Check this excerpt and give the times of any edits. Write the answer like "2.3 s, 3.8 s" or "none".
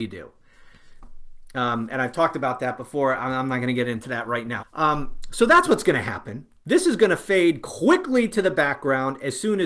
4.6 s

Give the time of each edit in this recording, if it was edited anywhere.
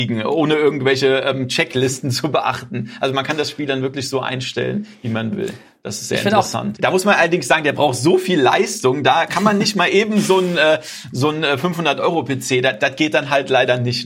6.8 s

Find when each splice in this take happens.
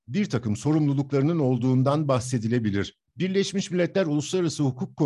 3.1 s

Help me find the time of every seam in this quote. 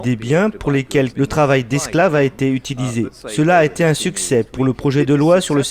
1.1 s

